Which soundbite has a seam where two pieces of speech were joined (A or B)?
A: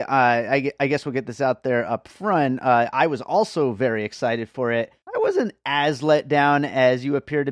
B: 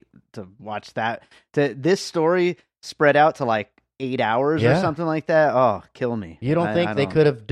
A